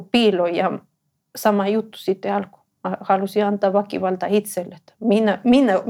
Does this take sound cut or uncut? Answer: uncut